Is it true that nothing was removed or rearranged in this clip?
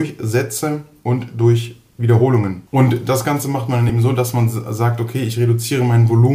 yes; 0 cuts

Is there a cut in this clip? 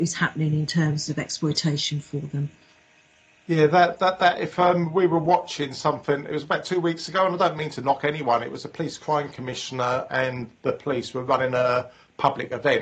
no; 0 cuts

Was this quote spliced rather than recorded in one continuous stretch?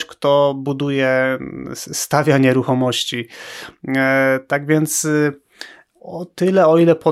no; 0 cuts

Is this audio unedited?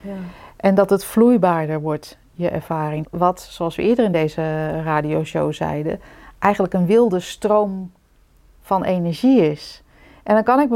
no; 1 cut; at 3.0 s

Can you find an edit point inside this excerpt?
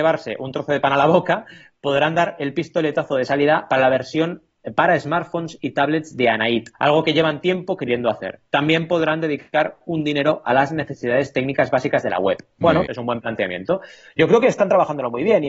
yes; 2 cuts; at 6.7 s, 12.9 s

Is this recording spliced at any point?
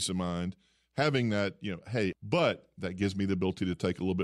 yes; 1 cut; at 2.1 s

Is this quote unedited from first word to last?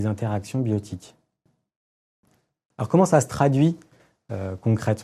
yes; 0 cuts

